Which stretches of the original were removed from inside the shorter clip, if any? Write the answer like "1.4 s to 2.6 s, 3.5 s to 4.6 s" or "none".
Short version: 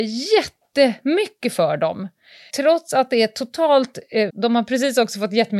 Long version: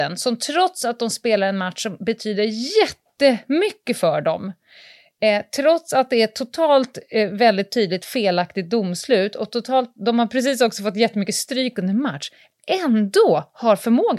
4.9 s to 5.5 s, 7.3 s to 9.9 s